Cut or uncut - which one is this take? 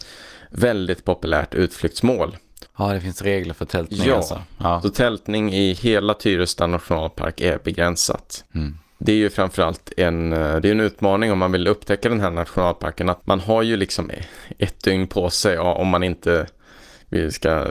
cut